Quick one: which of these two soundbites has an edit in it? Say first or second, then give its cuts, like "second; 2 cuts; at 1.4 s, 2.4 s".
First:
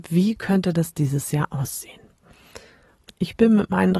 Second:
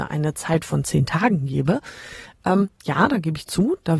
first; 1 cut; at 3.1 s